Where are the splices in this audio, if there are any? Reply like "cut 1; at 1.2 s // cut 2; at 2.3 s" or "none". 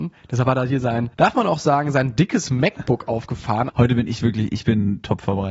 cut 1; at 1.1 s // cut 2; at 3.7 s